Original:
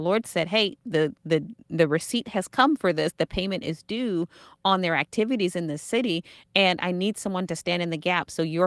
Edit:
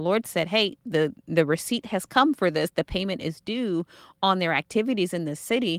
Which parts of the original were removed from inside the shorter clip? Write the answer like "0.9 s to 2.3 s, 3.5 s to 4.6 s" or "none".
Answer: 1.2 s to 1.6 s